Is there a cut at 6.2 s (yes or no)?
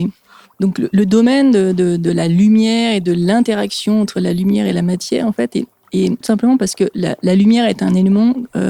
yes